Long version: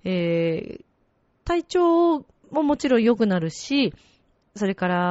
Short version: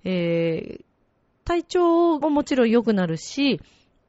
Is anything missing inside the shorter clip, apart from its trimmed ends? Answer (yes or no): yes